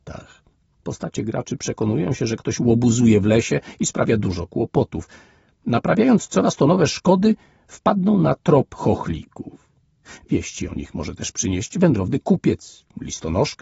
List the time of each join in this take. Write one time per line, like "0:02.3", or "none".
none